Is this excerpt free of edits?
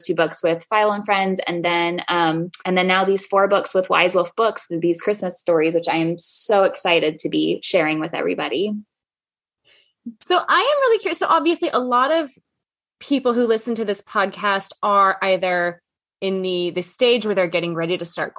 no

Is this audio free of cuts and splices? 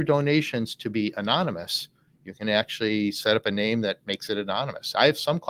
yes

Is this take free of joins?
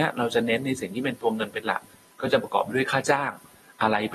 yes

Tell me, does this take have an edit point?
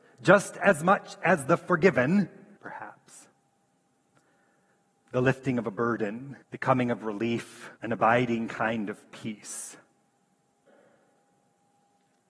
yes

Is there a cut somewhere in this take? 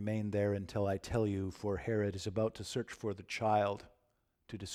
no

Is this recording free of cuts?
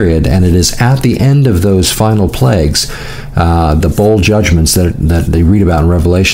no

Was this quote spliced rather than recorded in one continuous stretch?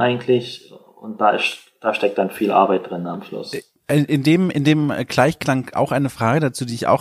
no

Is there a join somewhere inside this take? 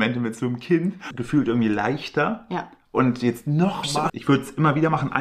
yes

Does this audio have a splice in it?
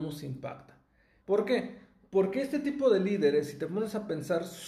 yes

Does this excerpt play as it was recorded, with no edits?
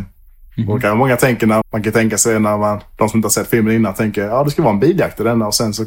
no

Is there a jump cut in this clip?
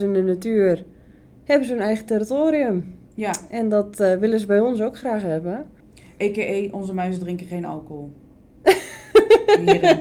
no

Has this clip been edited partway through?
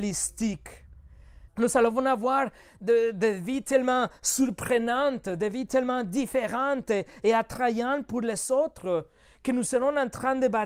yes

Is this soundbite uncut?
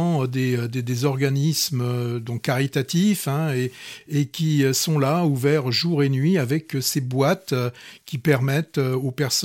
yes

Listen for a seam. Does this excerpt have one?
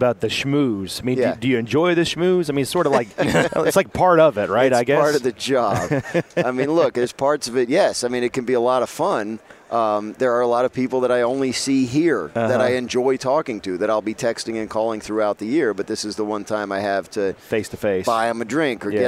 no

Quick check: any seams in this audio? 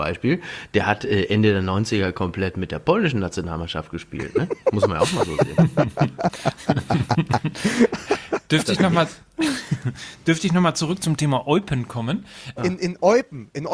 yes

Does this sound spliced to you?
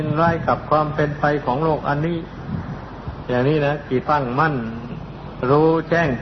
yes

